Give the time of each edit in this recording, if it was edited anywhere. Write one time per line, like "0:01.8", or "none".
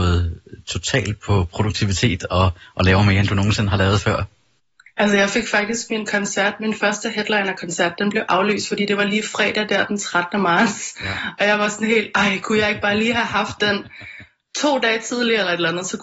0:01.2